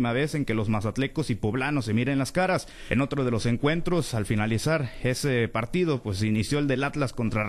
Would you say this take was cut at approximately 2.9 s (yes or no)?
yes